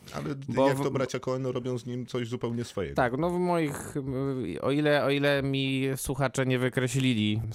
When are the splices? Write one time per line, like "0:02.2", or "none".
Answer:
none